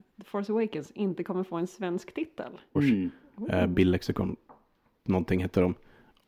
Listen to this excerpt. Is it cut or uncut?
cut